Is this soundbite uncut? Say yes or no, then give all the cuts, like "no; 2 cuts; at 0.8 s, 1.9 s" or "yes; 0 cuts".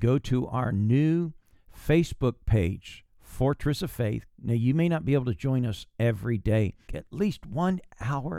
no; 2 cuts; at 4.3 s, 6.9 s